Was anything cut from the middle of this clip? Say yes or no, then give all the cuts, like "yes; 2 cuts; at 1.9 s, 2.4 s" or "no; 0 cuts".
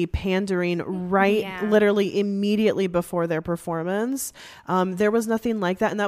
no; 0 cuts